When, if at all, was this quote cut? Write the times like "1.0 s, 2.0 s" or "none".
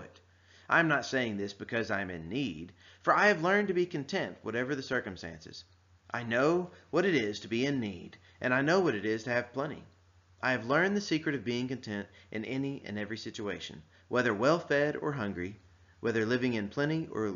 none